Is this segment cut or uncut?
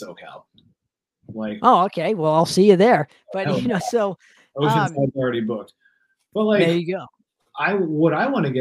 cut